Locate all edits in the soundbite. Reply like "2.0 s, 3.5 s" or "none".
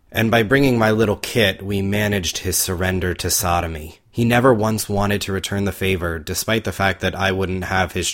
4.1 s

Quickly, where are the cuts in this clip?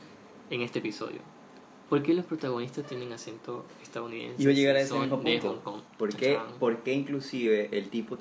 none

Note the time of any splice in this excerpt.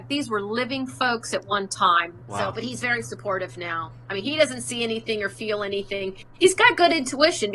2.2 s

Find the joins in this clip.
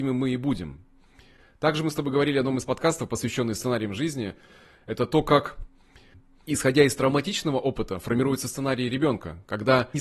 none

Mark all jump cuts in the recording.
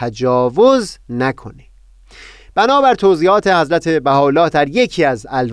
none

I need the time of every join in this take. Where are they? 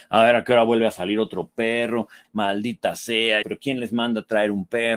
2.2 s, 3.4 s

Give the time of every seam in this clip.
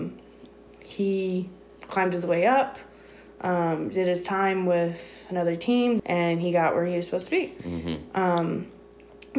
6.0 s

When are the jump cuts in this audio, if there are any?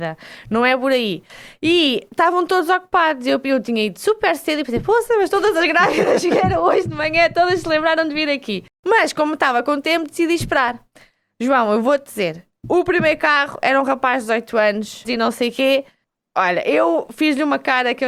15.0 s

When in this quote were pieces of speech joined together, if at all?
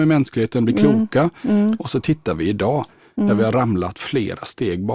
none

